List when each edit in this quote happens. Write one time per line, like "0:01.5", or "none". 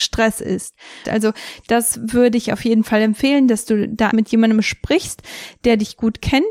0:01.0
0:04.1